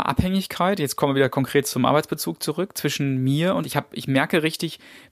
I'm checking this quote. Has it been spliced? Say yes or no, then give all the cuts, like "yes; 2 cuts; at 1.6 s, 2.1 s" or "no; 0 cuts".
yes; 1 cut; at 3.6 s